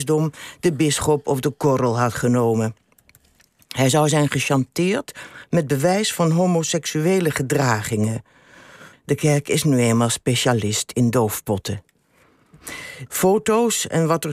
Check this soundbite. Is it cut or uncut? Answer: cut